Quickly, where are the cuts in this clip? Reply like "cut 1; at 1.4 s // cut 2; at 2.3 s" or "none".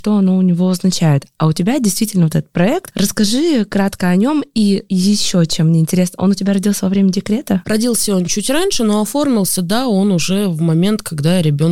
none